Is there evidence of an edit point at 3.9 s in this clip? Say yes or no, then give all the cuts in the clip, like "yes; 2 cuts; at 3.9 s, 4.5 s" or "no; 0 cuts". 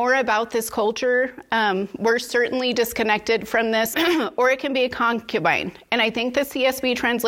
yes; 1 cut; at 3.9 s